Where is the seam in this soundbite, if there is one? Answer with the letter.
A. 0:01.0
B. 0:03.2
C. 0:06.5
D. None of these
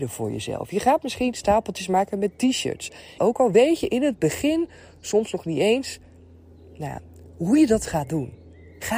B